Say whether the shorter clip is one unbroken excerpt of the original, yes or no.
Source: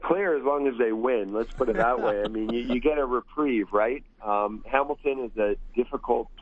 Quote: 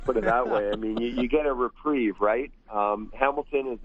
yes